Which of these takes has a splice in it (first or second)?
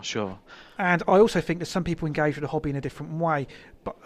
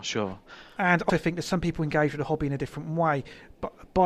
second